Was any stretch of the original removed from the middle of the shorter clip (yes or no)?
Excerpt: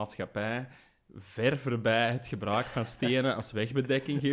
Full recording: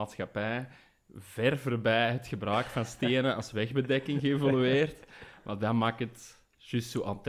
no